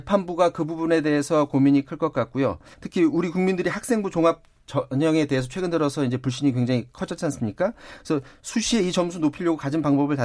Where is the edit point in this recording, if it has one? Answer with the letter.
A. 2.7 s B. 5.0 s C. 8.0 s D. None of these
A